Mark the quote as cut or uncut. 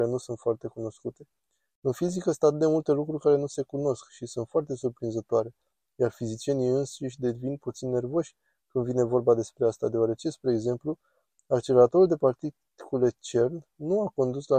uncut